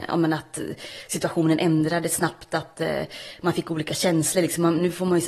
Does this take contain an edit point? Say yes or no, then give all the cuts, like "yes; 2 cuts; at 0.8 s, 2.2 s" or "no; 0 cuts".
no; 0 cuts